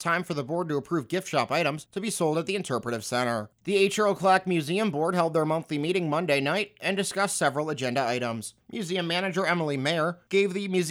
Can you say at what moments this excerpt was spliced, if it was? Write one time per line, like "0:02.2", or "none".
0:03.5